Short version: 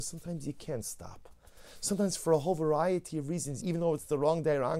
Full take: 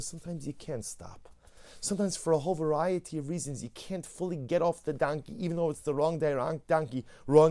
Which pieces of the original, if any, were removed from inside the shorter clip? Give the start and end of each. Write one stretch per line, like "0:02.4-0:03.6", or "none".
0:03.6-0:05.4